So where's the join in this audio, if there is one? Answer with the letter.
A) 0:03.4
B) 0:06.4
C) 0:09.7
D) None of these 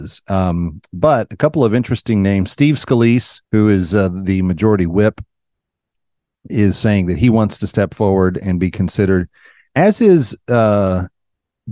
A